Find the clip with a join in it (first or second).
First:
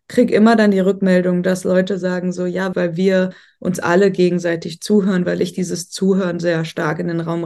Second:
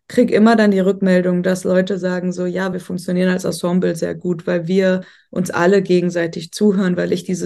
first